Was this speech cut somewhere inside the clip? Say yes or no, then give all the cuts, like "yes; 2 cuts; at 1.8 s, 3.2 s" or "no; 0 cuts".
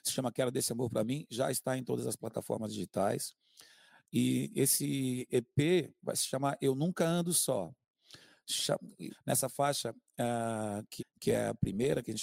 yes; 2 cuts; at 9.1 s, 11.0 s